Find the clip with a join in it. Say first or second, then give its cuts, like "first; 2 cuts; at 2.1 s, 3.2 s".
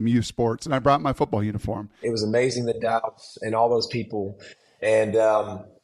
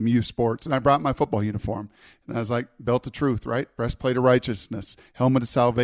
first; 1 cut; at 2.0 s